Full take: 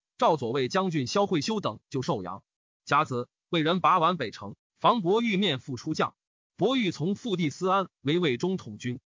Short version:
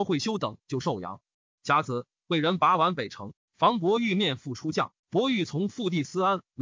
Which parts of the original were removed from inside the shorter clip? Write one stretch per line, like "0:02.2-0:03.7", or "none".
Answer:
0:06.2-0:06.5